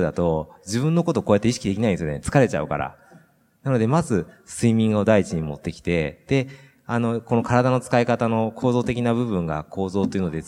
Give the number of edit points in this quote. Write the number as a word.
zero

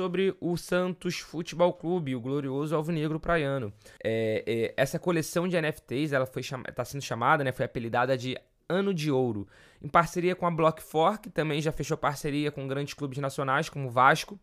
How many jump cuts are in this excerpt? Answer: one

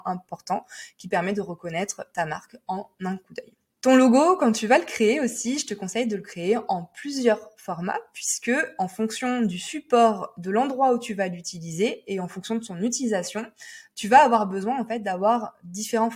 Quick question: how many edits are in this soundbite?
one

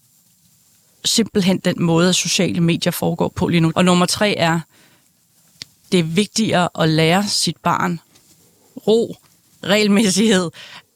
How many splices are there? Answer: one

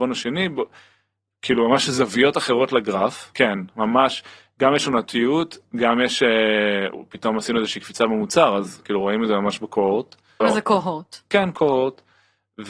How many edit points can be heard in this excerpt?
two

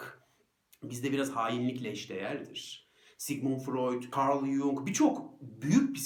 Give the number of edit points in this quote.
one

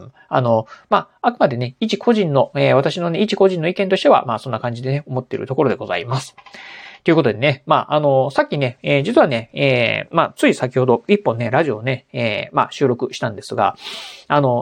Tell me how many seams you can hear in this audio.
zero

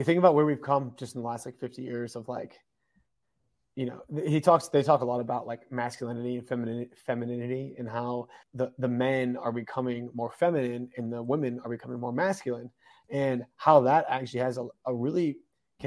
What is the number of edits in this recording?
one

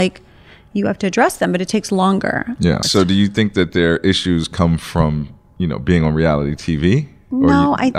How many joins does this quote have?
one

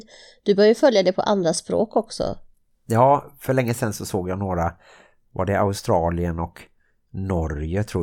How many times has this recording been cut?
zero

